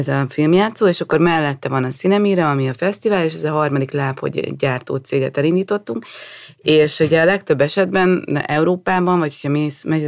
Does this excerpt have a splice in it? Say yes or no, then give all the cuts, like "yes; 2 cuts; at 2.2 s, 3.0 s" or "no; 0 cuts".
no; 0 cuts